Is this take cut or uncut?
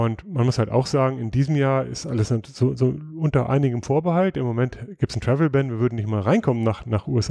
uncut